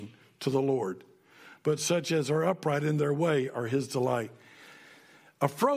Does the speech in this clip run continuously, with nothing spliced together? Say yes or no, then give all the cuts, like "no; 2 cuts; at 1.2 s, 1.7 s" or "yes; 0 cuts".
yes; 0 cuts